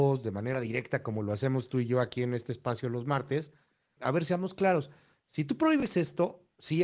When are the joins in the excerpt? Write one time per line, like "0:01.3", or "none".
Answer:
0:04.0